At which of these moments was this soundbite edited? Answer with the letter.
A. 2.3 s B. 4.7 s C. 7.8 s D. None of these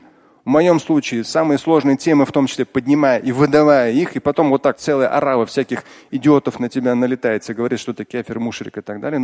B